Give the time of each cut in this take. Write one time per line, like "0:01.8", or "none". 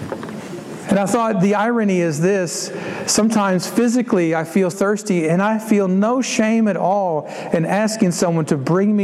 0:04.7